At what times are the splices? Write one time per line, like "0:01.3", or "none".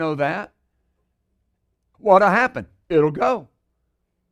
0:01.9